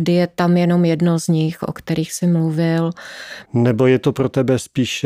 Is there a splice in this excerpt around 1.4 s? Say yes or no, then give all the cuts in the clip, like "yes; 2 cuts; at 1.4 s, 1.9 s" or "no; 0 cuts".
no; 1 cut; at 3.4 s